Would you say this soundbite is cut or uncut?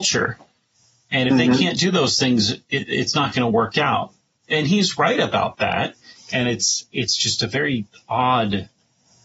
cut